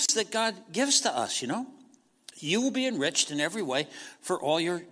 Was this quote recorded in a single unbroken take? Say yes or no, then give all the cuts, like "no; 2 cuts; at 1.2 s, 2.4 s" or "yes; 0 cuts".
yes; 0 cuts